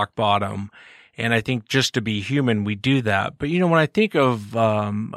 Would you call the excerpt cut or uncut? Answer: uncut